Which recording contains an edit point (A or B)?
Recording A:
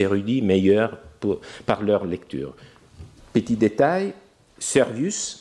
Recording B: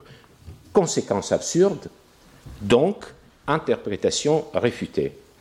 A